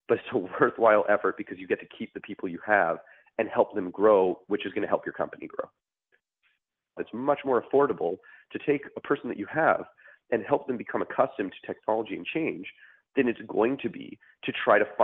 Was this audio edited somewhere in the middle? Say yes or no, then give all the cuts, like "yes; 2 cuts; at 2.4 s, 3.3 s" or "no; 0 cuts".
yes; 1 cut; at 7.0 s